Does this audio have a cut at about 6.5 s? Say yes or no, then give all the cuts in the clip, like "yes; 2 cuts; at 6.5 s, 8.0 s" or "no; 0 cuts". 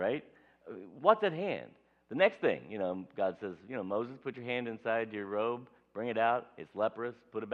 no; 0 cuts